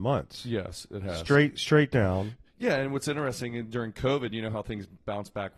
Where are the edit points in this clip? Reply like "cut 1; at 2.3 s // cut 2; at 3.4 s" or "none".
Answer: none